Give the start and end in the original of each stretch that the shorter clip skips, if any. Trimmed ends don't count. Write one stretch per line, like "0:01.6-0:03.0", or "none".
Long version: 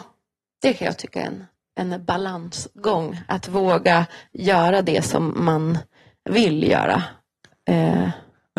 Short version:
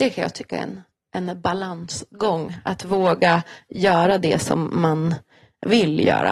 none